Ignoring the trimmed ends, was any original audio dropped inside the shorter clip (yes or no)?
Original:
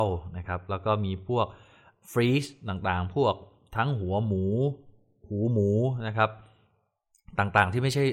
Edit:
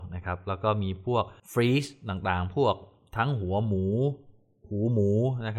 yes